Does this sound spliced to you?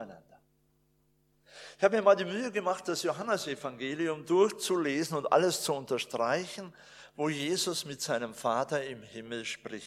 no; 0 cuts

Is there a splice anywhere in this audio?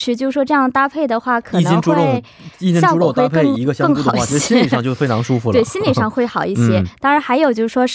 no; 0 cuts

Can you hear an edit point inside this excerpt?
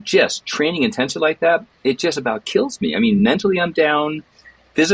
no; 0 cuts

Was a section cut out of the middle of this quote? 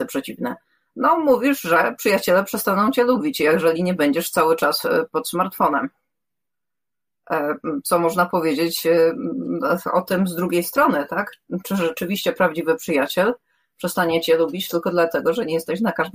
no; 0 cuts

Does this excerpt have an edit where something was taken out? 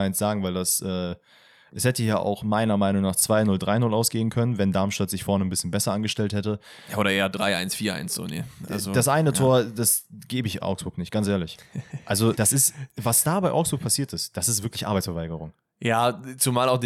yes; 1 cut; at 12.3 s

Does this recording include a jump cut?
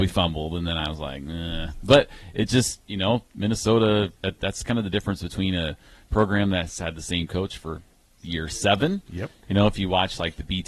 yes; 1 cut; at 4.2 s

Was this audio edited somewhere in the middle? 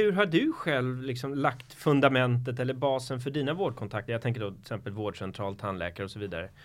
no; 0 cuts

